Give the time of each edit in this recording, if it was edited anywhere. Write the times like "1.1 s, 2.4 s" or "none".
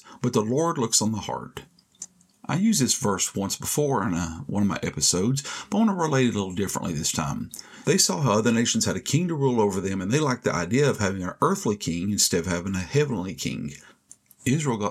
7.8 s